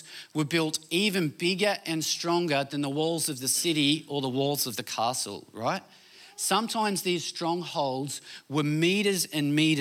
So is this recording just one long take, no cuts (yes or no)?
yes